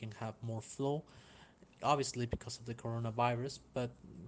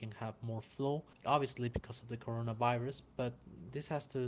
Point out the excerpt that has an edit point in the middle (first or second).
second